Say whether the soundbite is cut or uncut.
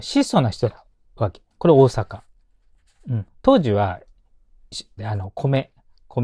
cut